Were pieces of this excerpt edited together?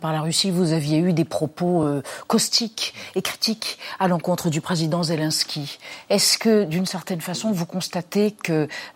no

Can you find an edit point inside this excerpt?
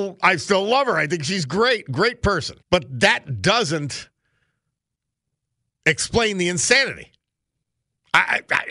yes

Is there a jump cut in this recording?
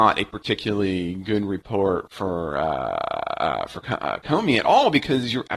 no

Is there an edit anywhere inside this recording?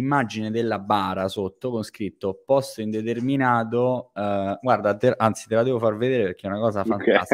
no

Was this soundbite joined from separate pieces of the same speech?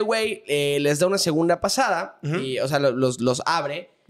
no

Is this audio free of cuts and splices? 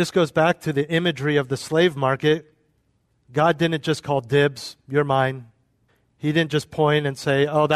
yes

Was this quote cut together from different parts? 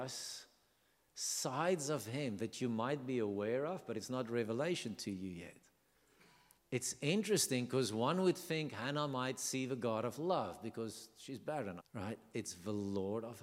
yes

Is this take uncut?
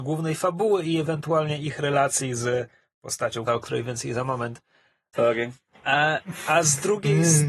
no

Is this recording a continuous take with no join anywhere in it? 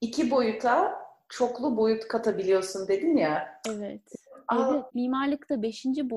no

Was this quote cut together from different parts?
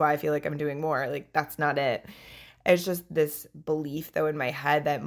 no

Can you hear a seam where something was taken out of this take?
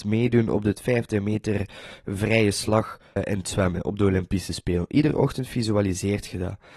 yes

